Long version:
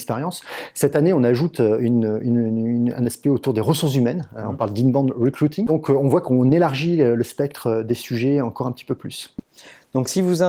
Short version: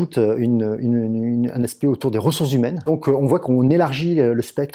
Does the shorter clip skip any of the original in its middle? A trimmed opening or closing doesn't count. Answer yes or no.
yes